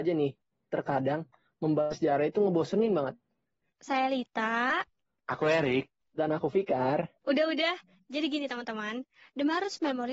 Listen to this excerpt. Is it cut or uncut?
cut